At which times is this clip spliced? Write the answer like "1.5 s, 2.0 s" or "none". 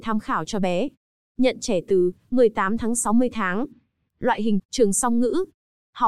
4.6 s